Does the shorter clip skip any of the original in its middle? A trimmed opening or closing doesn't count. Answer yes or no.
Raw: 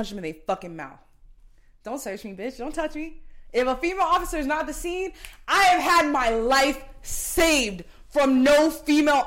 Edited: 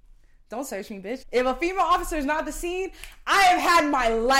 yes